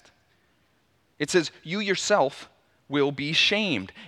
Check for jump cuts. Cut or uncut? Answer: uncut